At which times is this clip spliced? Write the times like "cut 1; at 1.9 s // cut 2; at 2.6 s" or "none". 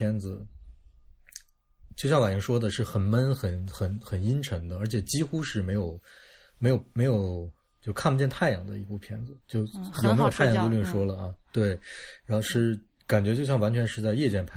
none

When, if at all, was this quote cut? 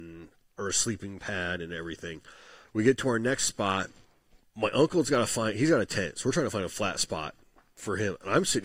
cut 1; at 2.6 s // cut 2; at 4.4 s

